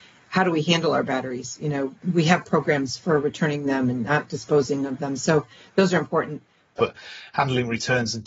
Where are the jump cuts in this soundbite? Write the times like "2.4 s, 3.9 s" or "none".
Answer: 6.8 s